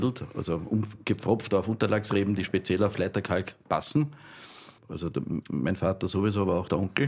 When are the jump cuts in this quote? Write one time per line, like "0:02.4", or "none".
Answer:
0:04.8